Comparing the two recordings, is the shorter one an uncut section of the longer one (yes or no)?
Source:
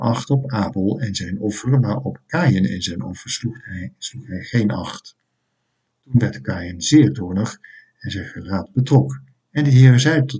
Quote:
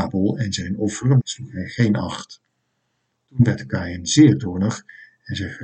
no